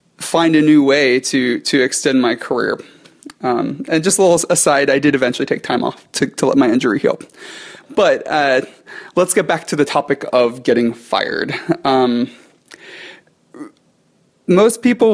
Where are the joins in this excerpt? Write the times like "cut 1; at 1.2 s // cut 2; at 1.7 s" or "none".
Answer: none